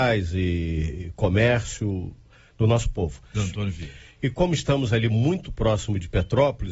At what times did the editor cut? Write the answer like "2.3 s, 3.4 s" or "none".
3.3 s